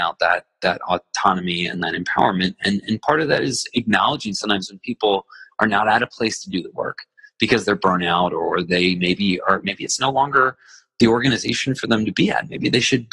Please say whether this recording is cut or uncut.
uncut